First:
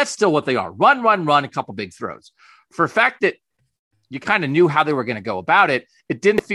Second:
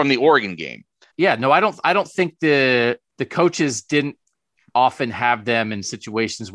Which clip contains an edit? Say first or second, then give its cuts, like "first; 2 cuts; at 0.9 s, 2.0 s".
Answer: second; 2 cuts; at 1.1 s, 3.1 s